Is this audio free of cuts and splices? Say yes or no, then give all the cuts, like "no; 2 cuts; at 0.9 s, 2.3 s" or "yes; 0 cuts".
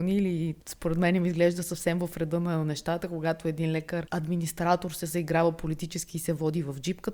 yes; 0 cuts